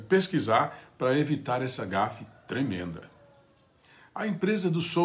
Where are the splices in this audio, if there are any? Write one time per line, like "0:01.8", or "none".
none